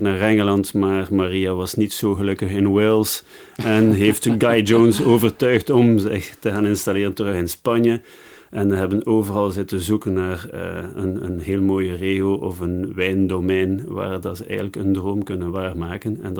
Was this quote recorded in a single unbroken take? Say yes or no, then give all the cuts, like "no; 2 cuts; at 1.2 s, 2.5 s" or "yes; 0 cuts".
yes; 0 cuts